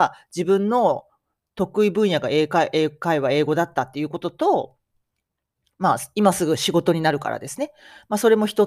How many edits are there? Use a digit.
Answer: 0